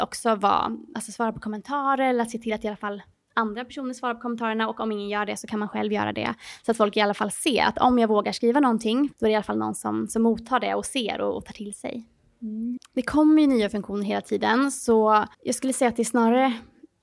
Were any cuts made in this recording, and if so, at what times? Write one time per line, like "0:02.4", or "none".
0:09.1
0:12.8
0:15.3